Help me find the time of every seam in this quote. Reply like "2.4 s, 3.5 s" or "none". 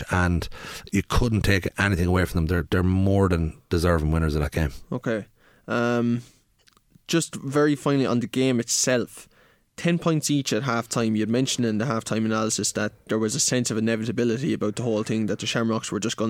2.7 s